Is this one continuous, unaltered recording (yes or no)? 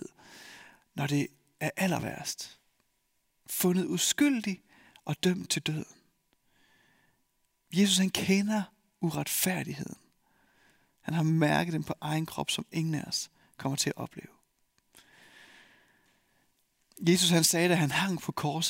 yes